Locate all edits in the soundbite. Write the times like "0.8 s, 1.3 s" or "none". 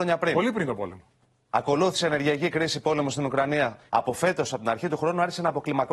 3.9 s